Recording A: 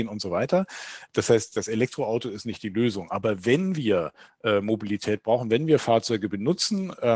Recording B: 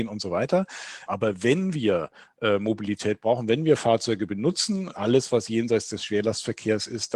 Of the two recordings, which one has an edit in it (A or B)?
B